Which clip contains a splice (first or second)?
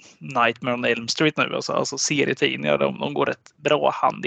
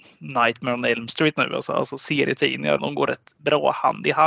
second